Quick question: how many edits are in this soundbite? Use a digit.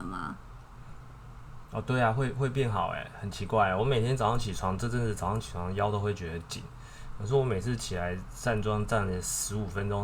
0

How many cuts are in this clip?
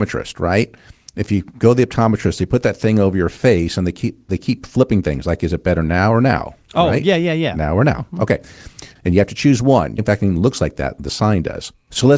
2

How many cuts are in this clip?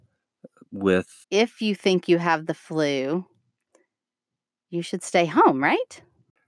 1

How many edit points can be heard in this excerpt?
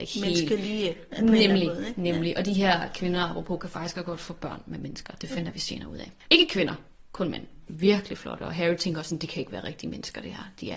2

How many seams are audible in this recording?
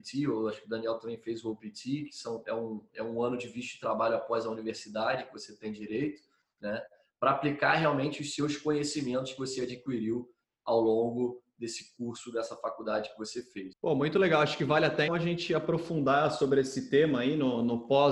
2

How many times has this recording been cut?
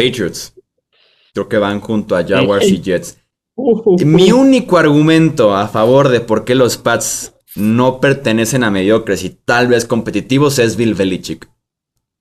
1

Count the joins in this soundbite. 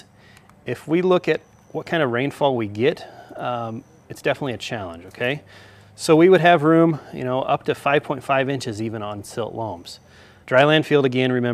1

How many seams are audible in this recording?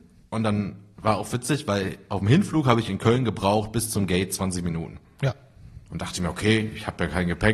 0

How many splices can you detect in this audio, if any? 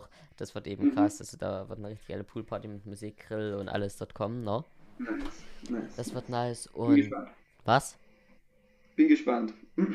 0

